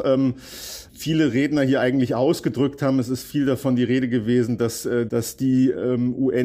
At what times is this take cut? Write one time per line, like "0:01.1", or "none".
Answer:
0:05.1